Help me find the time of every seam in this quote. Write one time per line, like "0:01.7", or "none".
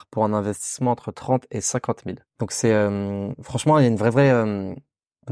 0:02.3